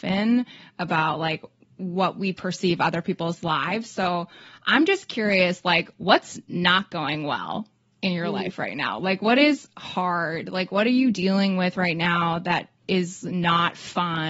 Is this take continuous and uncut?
yes; 0 cuts

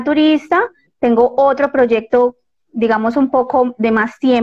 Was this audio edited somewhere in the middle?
no; 0 cuts

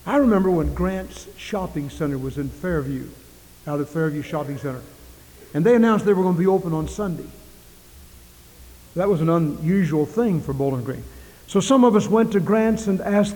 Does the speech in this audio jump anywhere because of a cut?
no; 0 cuts

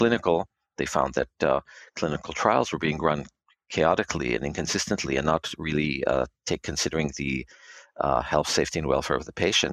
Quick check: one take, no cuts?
yes; 0 cuts

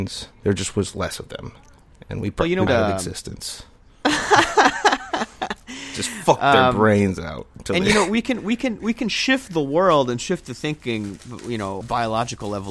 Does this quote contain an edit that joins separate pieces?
yes; 2 cuts; at 2.7 s, 11.8 s

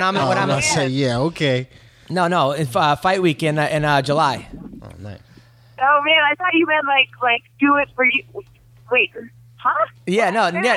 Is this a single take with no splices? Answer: yes; 0 cuts

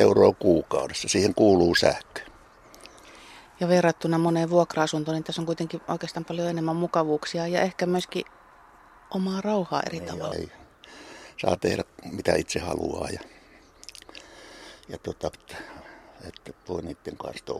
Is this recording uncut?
no; 2 cuts; at 10.3 s, 15.3 s

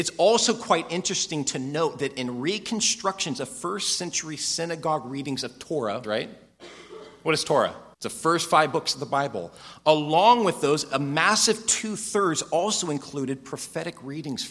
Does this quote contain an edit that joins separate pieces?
yes; 2 cuts; at 6.0 s, 7.9 s

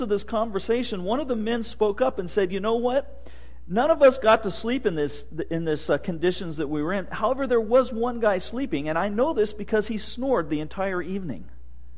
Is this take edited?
no; 0 cuts

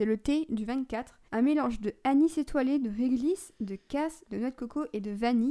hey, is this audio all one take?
no; 1 cut; at 1.3 s

